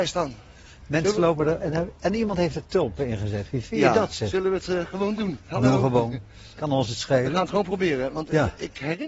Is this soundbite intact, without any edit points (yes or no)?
yes